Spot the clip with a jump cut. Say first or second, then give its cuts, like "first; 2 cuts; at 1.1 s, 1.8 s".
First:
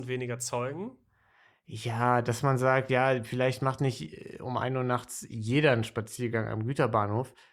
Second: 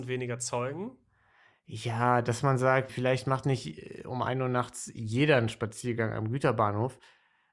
second; 1 cut; at 2.9 s